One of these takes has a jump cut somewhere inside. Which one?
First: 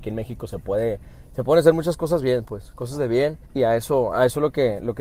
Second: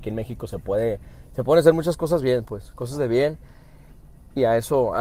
first; 1 cut; at 3.4 s

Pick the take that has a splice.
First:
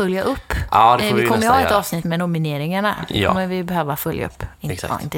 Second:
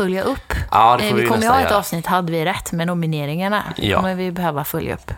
first; 1 cut; at 2.0 s

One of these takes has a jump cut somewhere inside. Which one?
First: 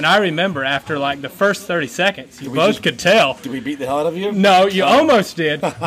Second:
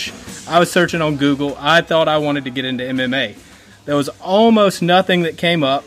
second; 1 cut; at 3.7 s

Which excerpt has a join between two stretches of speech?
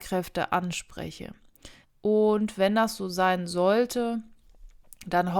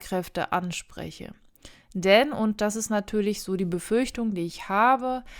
first; 1 cut; at 1.8 s

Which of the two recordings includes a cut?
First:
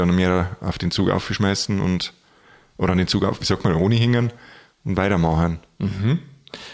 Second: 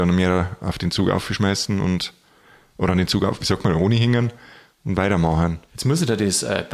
second; 1 cut; at 5.7 s

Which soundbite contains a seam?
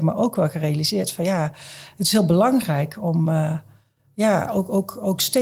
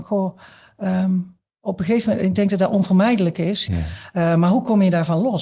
second; 2 cuts; at 1.5 s, 3.7 s

